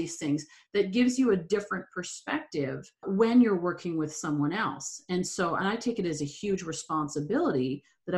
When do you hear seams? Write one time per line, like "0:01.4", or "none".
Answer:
0:03.0

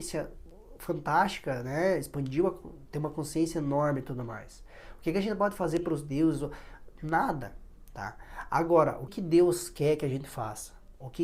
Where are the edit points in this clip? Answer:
0:09.1

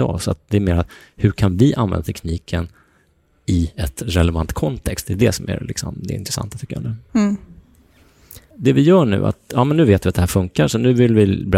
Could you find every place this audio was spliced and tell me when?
0:08.5

